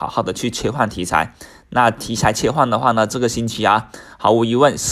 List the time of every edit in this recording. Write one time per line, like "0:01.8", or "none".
none